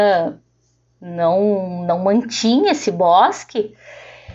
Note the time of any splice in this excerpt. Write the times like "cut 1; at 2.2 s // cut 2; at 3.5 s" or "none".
none

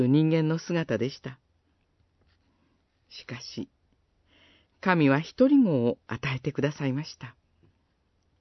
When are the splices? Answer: cut 1; at 4.7 s

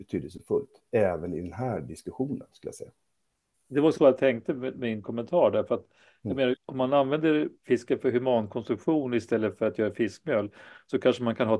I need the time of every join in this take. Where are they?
cut 1; at 6.6 s

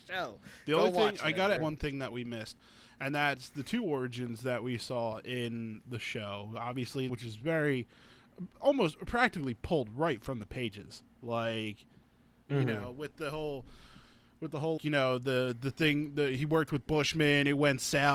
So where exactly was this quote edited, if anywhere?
cut 1; at 1.6 s // cut 2; at 7.1 s // cut 3; at 14.8 s

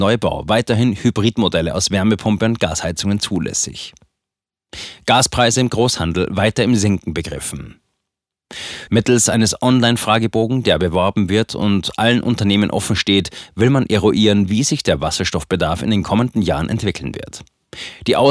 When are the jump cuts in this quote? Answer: cut 1; at 8.9 s

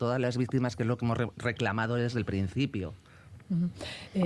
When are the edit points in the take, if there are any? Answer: none

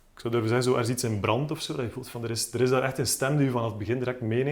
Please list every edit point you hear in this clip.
none

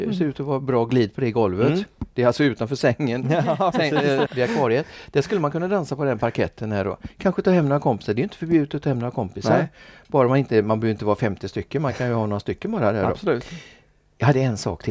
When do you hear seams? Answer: cut 1; at 4.3 s

